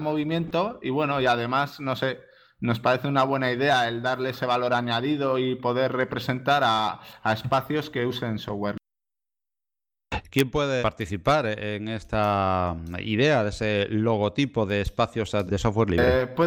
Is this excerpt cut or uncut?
cut